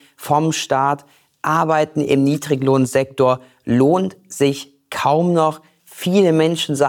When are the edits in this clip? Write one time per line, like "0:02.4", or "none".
none